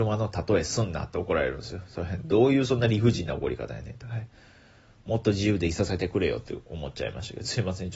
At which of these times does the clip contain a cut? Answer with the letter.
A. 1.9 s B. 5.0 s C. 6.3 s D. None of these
D